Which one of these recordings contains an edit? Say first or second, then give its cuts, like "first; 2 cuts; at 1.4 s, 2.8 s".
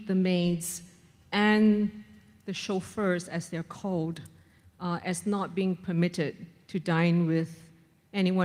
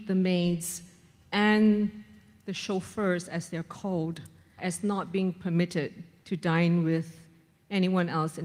second; 1 cut; at 4.6 s